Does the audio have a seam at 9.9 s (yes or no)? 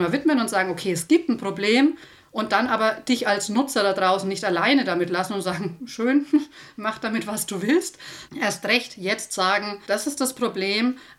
yes